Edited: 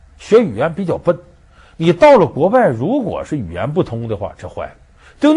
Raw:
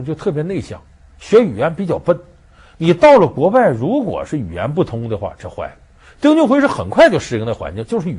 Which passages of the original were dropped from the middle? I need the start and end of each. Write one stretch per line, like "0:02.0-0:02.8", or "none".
none